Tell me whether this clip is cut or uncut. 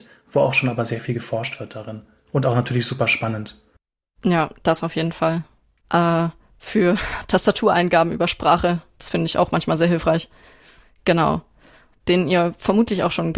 cut